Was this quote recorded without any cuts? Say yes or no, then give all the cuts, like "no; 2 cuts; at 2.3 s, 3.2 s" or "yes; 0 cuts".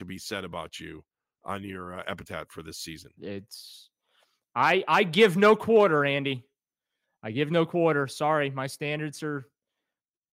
no; 1 cut; at 3.2 s